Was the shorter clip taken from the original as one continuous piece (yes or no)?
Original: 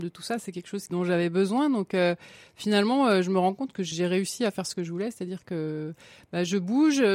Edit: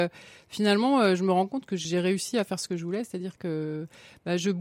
yes